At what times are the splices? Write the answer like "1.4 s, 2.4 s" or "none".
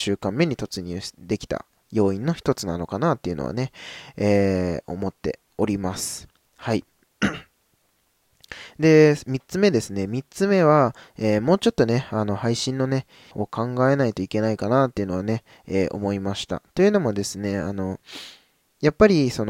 13.3 s